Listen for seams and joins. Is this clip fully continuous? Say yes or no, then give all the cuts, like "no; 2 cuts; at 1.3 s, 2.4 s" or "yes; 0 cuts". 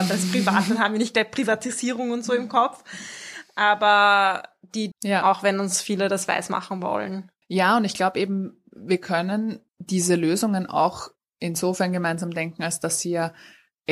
no; 3 cuts; at 4.9 s, 7.4 s, 9.7 s